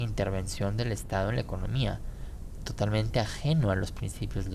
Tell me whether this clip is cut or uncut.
uncut